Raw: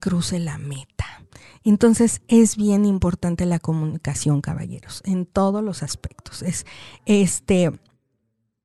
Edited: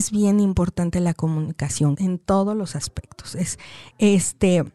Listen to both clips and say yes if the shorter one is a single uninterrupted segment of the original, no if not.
no